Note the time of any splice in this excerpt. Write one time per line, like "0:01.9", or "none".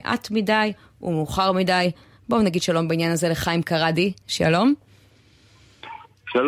none

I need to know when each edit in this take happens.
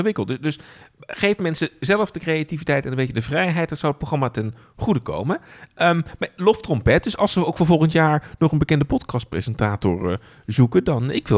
none

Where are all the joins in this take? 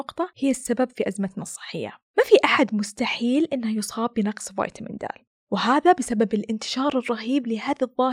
0:02.1

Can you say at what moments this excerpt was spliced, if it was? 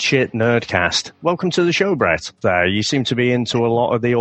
0:02.4

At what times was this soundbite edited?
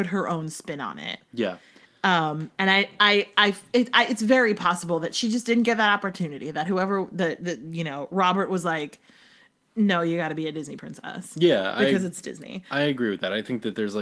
none

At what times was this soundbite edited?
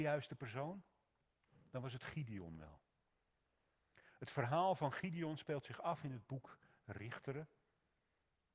none

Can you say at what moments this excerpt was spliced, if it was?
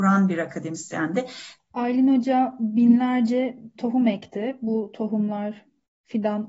0:01.6

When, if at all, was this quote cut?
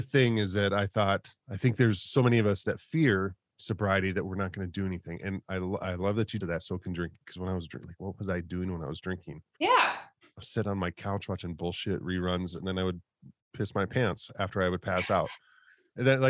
0:01.4
0:06.4

